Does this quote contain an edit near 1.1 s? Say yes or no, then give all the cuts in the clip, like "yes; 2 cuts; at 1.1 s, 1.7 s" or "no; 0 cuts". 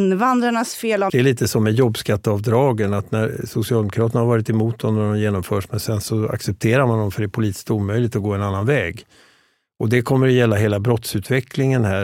yes; 1 cut; at 1.1 s